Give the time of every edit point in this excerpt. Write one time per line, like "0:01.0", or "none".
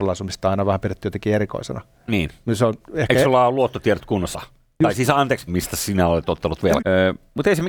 0:04.3
0:05.5
0:06.8